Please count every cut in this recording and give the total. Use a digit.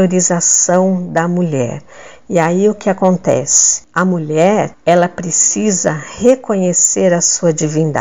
0